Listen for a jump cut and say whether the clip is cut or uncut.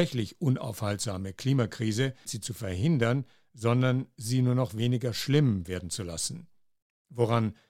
cut